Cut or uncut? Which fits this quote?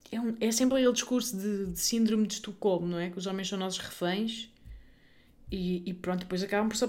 uncut